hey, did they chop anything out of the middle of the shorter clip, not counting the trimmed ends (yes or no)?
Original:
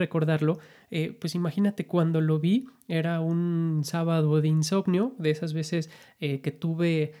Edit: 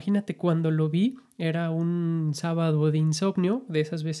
no